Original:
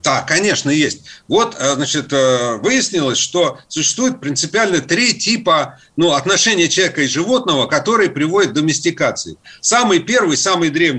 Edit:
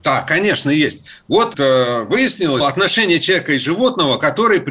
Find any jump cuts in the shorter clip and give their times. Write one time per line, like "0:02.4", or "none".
0:01.5
0:02.6